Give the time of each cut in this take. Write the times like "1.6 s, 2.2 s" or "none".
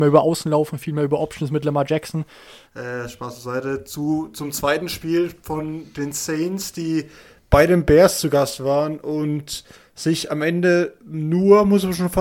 2.7 s

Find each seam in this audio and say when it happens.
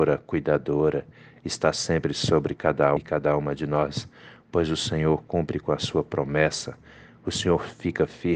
3.0 s

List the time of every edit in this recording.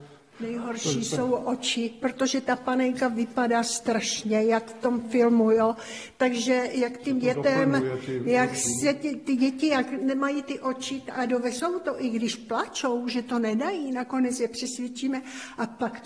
none

